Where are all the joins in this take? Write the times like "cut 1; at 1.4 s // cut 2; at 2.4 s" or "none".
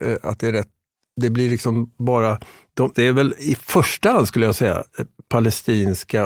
cut 1; at 2.9 s